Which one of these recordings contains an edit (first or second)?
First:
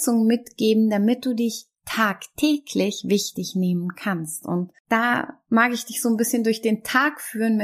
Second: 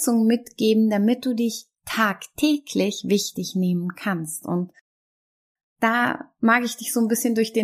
first